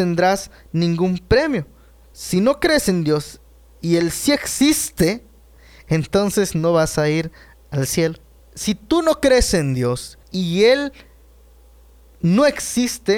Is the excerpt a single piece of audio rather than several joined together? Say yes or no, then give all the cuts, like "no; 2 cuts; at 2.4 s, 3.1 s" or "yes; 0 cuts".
no; 2 cuts; at 8.4 s, 10.2 s